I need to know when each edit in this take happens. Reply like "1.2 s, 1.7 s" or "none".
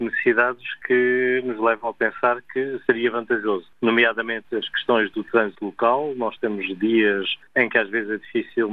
2.9 s